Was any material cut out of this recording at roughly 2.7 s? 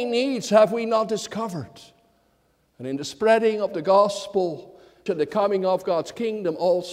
yes; 2 cuts; at 2.7 s, 5.1 s

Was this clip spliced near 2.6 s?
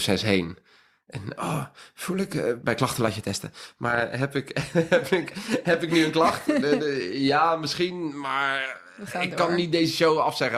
yes; 1 cut; at 2.6 s

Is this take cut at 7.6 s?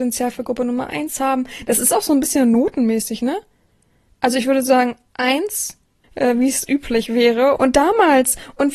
yes; 2 cuts; at 6.0 s, 7.6 s

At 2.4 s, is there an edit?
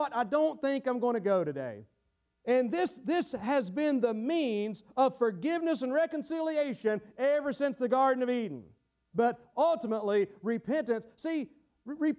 yes; 2 cuts; at 2.4 s, 9.1 s

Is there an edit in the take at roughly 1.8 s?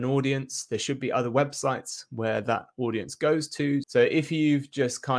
no; 1 cut; at 3.8 s

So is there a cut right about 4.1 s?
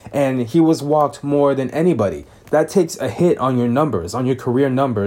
no; 0 cuts

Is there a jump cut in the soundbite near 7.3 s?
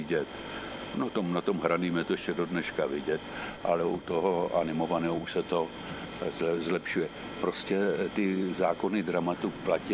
no; 0 cuts

